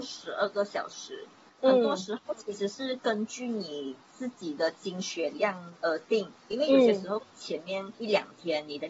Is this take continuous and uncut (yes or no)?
yes